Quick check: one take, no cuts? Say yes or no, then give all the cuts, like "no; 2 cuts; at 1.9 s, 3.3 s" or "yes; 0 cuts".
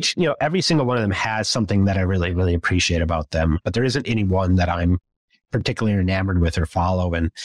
yes; 0 cuts